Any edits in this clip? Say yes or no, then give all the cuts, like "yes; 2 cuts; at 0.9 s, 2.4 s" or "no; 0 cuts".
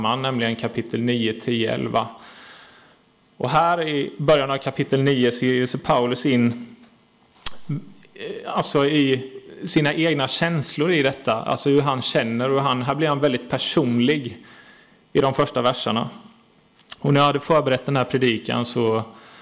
no; 0 cuts